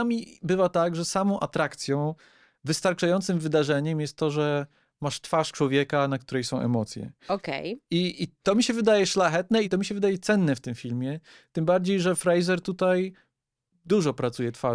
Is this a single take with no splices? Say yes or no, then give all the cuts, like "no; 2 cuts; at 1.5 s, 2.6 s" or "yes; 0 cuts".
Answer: no; 1 cut; at 9.6 s